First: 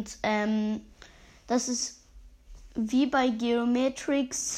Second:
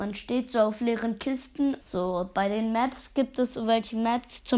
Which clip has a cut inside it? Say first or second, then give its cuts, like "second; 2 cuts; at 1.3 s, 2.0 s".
second; 1 cut; at 1.8 s